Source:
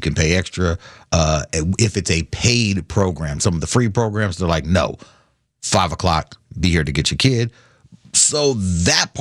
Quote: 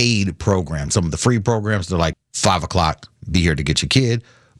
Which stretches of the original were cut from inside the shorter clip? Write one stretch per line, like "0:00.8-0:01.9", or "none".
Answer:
0:04.6-0:05.4